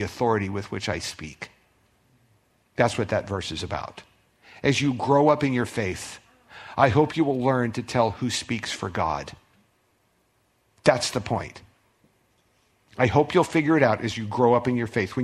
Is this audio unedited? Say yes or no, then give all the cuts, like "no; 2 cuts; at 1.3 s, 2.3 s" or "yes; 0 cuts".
yes; 0 cuts